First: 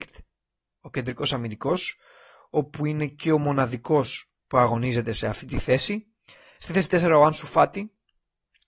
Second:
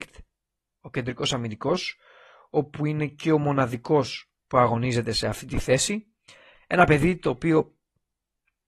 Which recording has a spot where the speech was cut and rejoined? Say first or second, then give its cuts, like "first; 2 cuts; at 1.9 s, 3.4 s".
second; 1 cut; at 6.5 s